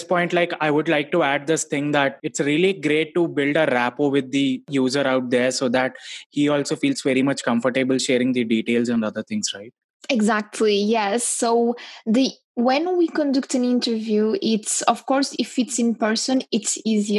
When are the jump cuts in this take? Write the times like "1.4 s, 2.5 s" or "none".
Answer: none